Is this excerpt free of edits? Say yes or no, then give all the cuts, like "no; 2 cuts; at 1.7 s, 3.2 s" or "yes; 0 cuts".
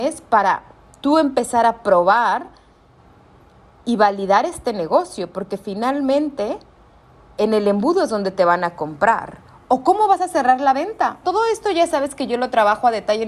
no; 1 cut; at 11.2 s